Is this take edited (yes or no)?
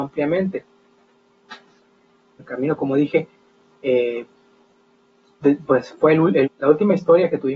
yes